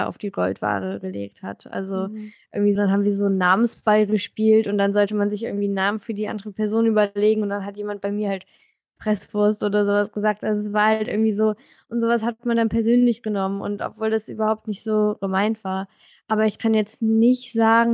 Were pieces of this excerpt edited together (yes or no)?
yes